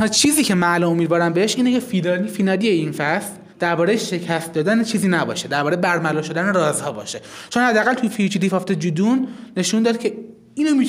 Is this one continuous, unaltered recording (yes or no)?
no